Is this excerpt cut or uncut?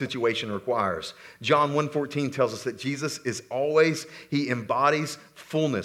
uncut